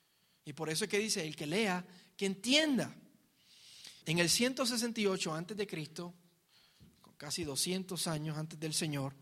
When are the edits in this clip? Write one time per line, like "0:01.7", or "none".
0:04.0

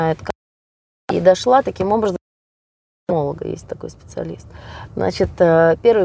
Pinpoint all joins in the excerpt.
0:04.9

